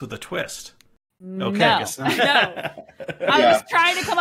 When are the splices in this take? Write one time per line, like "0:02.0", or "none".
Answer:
0:02.2